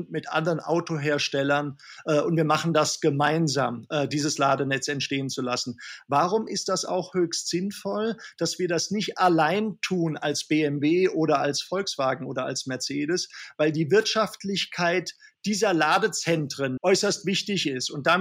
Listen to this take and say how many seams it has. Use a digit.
1